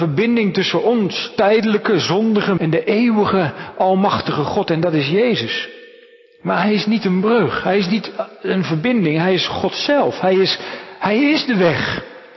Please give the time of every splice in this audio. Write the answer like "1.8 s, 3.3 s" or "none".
2.6 s